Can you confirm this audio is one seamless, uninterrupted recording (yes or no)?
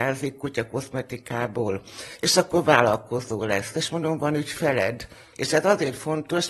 no